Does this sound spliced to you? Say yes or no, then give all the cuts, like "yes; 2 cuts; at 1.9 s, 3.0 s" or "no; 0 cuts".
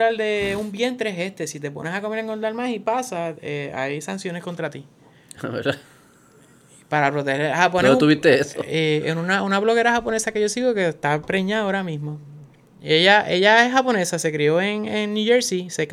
no; 0 cuts